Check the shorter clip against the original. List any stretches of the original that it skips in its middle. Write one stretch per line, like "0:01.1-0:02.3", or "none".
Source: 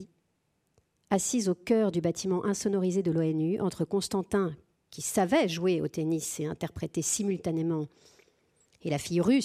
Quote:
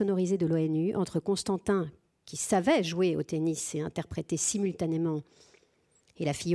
none